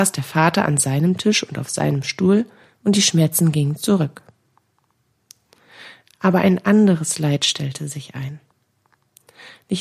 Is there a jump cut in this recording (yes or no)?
no